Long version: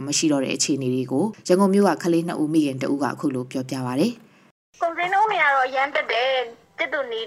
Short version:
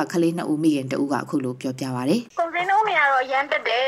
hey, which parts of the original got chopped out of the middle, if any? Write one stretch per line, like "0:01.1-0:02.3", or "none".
0:04.2-0:04.7